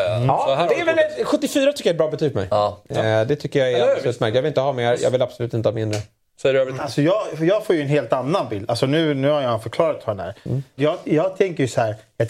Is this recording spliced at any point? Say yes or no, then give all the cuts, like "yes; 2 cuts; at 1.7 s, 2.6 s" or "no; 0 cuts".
yes; 2 cuts; at 6.8 s, 10.8 s